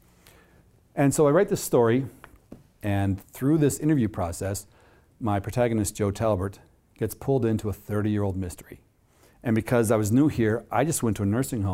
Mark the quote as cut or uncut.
cut